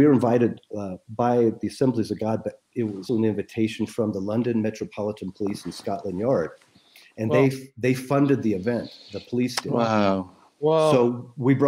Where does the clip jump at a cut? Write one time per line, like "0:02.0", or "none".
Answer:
0:03.1